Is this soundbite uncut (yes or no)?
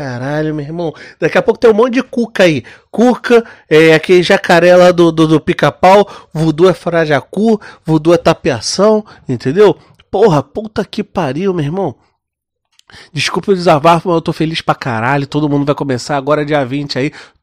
yes